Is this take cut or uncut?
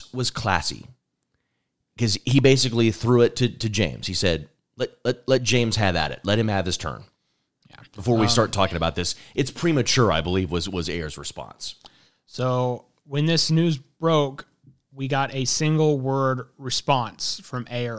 uncut